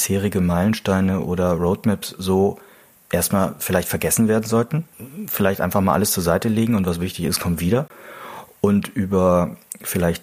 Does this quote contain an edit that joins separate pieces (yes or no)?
no